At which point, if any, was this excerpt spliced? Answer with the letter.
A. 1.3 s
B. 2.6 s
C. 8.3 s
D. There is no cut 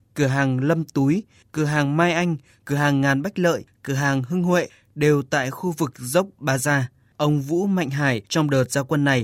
C